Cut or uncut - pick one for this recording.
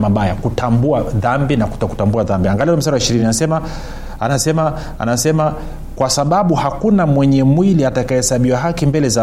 uncut